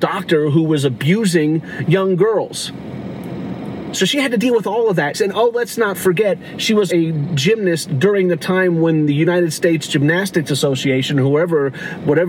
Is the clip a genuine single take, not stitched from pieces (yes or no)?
no